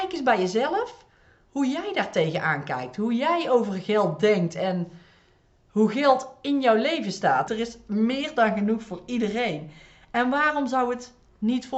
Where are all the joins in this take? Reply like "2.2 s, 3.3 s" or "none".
7.5 s